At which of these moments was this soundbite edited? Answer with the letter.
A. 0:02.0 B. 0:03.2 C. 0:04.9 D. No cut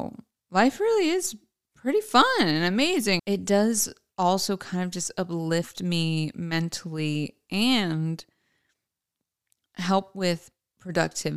B